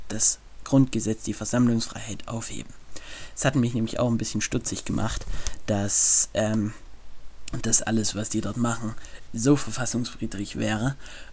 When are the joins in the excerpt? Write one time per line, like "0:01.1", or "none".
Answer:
0:09.3